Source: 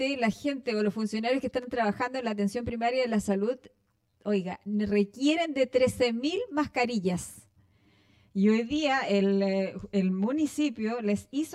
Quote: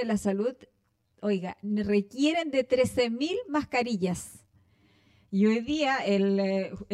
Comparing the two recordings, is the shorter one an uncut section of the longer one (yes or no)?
yes